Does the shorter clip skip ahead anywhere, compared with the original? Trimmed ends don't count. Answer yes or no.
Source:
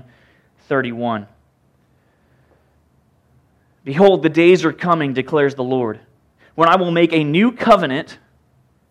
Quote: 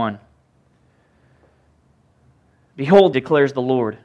yes